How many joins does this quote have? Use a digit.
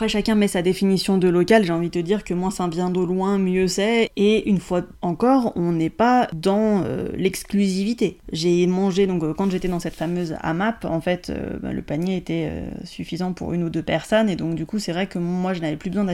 0